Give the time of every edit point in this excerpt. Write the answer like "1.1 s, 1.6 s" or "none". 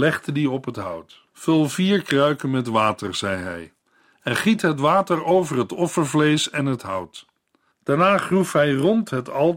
1.3 s, 7.7 s